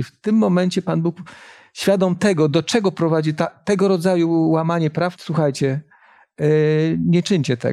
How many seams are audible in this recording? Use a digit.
1